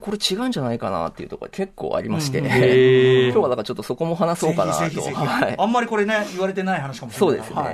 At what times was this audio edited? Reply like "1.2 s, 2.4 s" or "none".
none